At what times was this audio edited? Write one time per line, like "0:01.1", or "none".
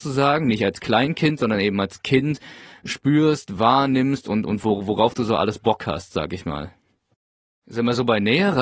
none